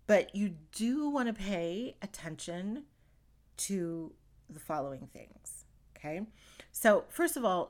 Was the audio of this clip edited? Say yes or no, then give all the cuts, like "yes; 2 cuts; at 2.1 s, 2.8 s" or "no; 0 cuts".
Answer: no; 0 cuts